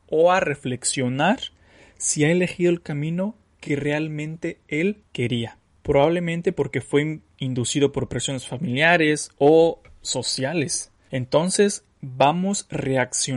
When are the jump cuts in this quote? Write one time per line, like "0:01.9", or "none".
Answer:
none